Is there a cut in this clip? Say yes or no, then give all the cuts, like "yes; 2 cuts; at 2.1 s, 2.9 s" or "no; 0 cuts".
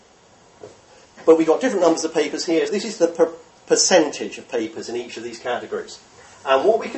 yes; 2 cuts; at 1.0 s, 2.7 s